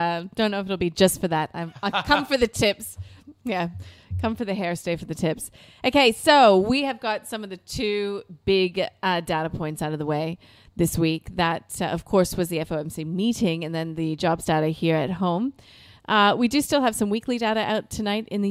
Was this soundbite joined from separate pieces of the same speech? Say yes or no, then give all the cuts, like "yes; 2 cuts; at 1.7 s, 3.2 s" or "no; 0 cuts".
no; 0 cuts